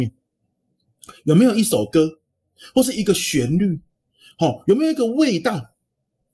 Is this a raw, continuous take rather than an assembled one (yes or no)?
yes